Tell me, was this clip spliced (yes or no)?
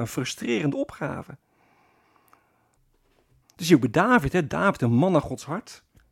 yes